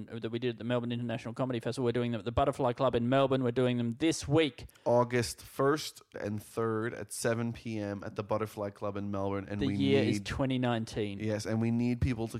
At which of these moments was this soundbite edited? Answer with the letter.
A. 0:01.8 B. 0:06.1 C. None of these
B